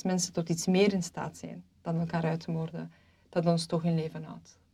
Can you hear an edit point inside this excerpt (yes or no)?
no